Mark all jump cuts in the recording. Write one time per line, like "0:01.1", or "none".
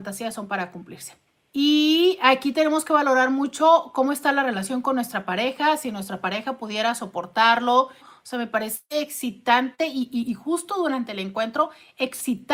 0:08.0

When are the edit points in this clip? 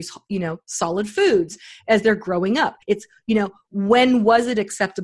0:02.8

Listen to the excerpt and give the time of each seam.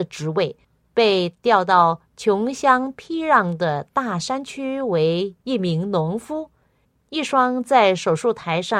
none

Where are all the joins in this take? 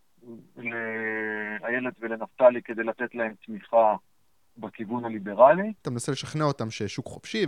0:05.7

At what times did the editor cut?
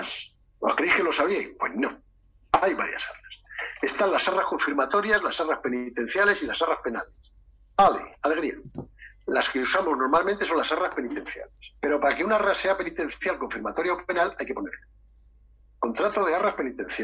0:11.8

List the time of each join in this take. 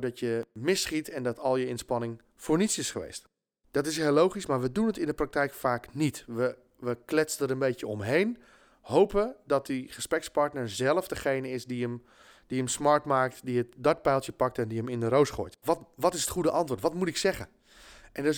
0:03.6
0:15.6

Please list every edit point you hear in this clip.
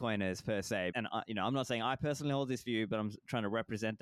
0:00.9

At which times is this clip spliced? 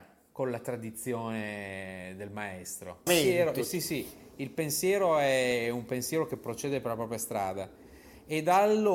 0:03.1

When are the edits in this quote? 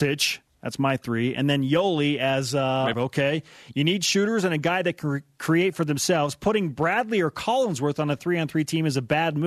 0:02.9

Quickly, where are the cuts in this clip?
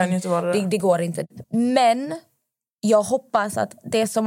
0:01.4

